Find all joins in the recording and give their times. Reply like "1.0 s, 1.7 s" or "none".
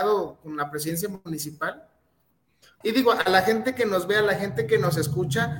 2.8 s